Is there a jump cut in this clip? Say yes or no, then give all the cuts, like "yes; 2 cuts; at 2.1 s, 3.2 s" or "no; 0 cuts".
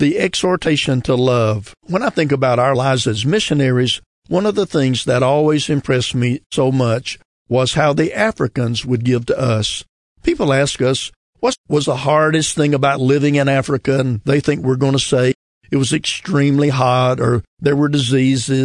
yes; 1 cut; at 1.8 s